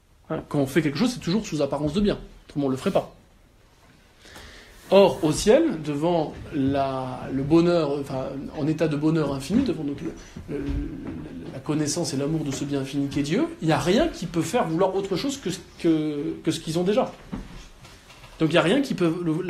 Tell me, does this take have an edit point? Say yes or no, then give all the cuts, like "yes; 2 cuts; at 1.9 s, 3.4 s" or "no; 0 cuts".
no; 0 cuts